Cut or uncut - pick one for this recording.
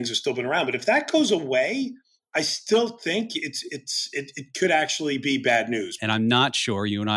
cut